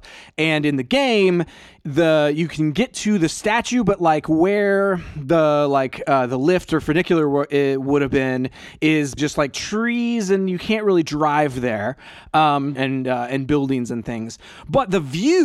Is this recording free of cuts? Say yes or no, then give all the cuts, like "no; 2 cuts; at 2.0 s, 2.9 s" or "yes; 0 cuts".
no; 2 cuts; at 9.2 s, 12.8 s